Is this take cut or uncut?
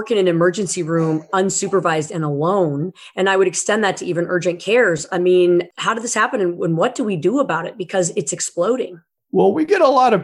uncut